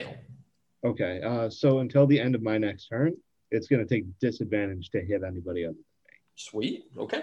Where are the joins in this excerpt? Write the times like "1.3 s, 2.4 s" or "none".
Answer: none